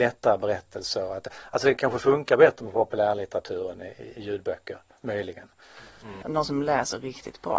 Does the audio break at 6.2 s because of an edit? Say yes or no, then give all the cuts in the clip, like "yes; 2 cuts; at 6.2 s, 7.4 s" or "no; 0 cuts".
yes; 1 cut; at 6.2 s